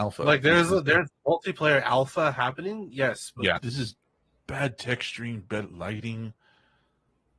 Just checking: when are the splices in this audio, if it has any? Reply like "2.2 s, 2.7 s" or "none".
3.6 s